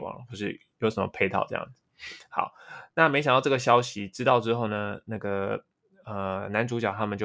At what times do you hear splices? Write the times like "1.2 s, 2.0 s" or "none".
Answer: none